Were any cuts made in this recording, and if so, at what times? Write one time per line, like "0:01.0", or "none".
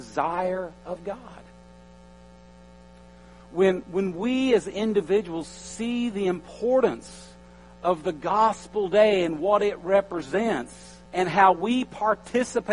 0:03.8
0:11.1